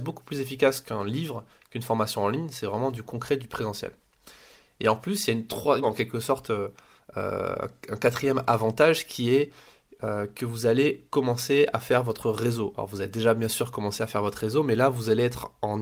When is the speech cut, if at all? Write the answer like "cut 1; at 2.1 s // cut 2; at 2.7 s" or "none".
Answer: cut 1; at 5.8 s